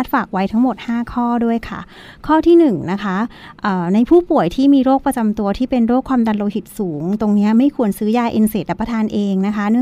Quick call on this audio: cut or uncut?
uncut